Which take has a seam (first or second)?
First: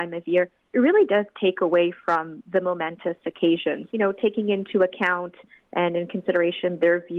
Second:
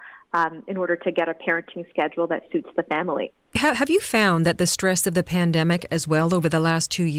first